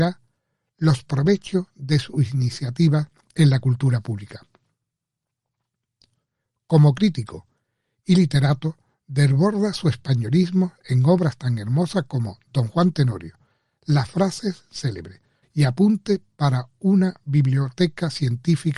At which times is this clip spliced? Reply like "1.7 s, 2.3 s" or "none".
15.4 s